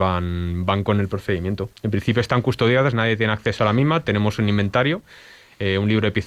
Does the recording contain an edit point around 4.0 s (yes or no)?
no